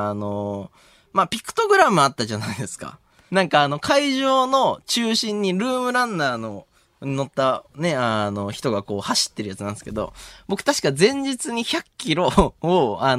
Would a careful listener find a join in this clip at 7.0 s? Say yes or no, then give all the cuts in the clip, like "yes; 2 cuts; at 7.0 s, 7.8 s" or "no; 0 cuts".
no; 1 cut; at 3.3 s